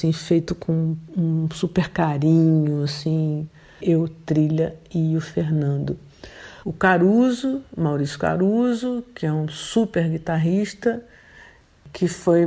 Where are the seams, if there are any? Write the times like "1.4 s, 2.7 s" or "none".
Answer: 3.8 s, 6.6 s